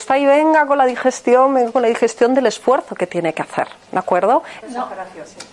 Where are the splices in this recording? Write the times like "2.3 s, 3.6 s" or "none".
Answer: 4.6 s

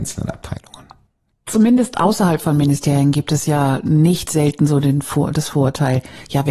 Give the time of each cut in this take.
none

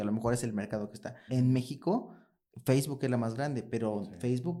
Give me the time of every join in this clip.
1.3 s

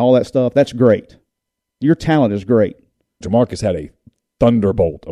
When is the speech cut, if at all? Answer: 3.2 s

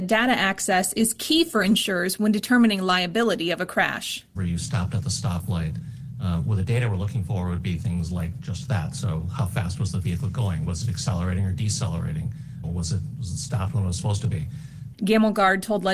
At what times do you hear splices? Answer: 4.4 s, 12.6 s, 14.9 s

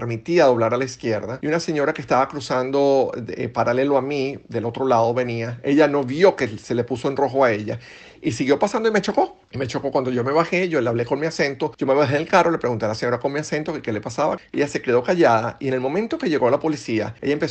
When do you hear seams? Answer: 14.4 s

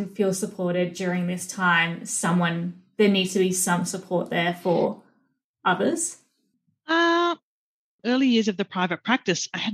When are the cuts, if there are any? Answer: 8.0 s

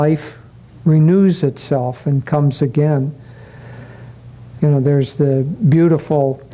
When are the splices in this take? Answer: 4.6 s

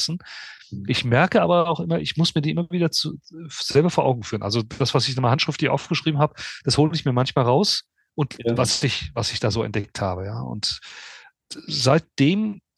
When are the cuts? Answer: 8.6 s, 11.3 s

